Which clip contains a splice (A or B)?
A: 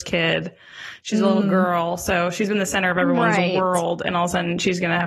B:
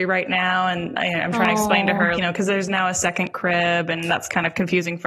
B